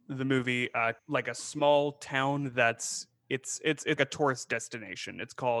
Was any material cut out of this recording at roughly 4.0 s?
yes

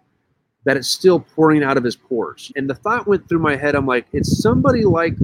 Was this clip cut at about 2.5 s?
yes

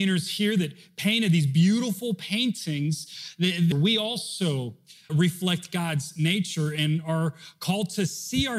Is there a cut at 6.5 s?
no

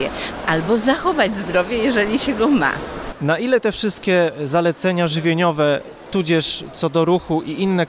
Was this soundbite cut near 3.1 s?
yes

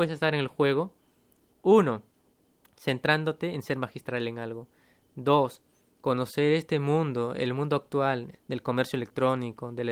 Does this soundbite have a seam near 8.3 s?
yes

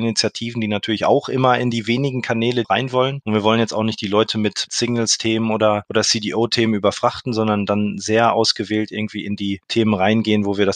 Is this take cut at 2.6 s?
yes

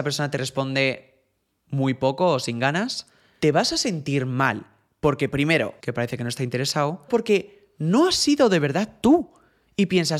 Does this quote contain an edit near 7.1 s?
yes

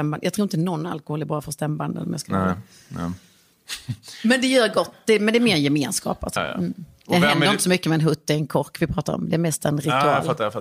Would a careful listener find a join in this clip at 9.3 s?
no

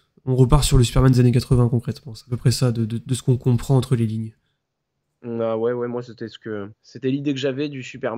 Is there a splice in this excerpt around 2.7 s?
no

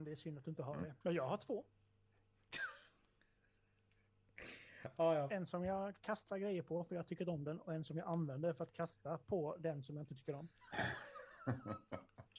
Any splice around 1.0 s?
yes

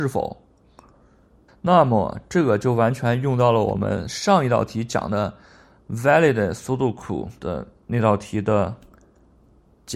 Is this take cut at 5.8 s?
no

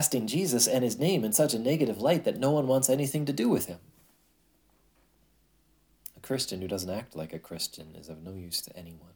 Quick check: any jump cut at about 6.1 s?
no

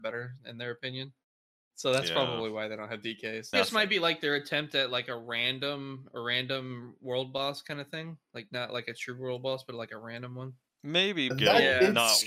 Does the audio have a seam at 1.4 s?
no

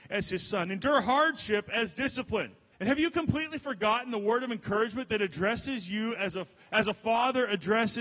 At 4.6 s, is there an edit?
no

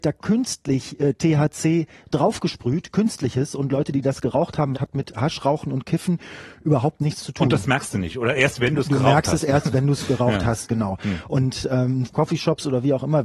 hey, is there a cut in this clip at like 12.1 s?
yes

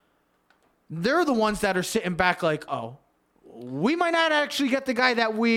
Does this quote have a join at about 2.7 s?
yes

